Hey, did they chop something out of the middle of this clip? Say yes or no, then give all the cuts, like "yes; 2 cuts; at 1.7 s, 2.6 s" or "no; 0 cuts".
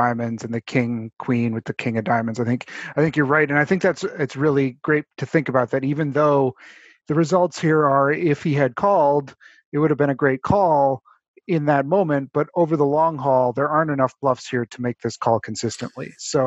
no; 0 cuts